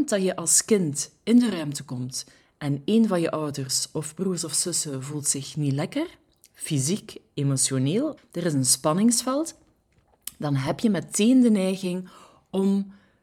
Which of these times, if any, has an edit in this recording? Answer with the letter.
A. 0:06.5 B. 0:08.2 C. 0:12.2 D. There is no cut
B